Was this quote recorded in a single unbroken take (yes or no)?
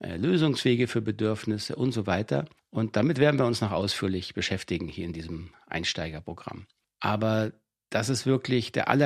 yes